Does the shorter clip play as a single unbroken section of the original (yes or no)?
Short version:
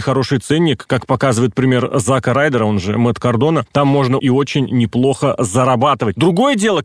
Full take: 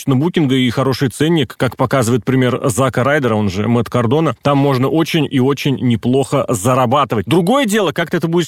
no